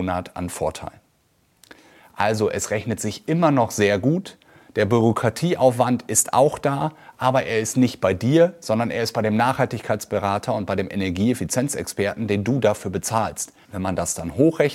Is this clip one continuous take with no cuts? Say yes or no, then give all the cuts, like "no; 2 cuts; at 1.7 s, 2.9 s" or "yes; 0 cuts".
no; 2 cuts; at 4.6 s, 13.6 s